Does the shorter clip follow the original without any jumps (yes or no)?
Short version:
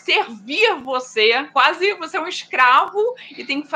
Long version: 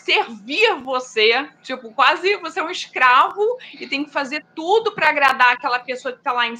no